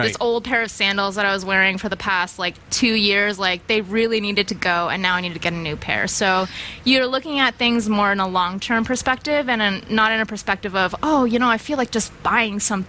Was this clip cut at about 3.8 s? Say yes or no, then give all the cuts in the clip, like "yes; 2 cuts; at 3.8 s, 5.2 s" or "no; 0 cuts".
no; 0 cuts